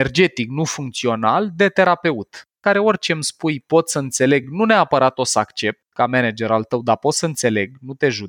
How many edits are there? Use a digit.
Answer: 0